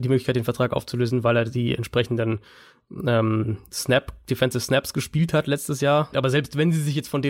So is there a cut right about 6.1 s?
yes; 1 cut; at 6.1 s

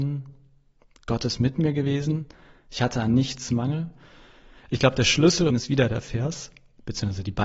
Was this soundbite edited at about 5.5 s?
yes; 1 cut; at 5.5 s

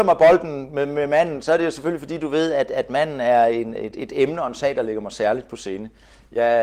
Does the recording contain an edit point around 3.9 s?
no; 0 cuts

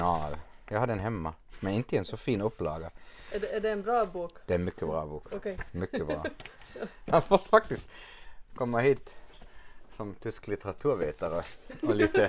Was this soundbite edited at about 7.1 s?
yes; 1 cut; at 7.1 s

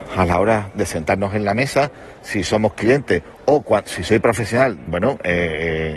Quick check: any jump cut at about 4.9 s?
yes; 1 cut; at 4.9 s

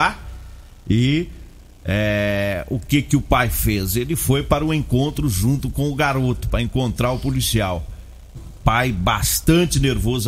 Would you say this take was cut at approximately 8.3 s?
yes; 1 cut; at 8.3 s

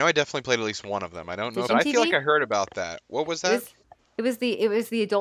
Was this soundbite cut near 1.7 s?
yes; 1 cut; at 1.7 s

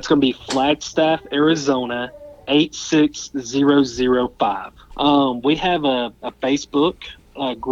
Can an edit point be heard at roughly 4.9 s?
yes; 1 cut; at 4.9 s

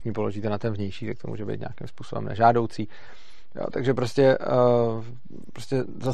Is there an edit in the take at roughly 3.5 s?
no; 0 cuts

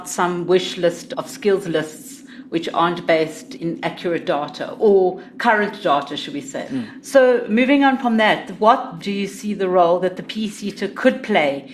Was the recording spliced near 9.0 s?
yes; 1 cut; at 9.0 s

